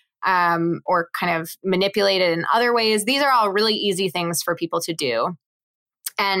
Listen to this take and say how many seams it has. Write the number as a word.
zero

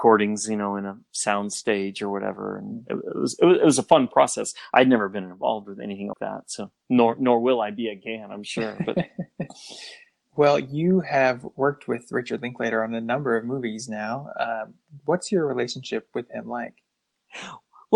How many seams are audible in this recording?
one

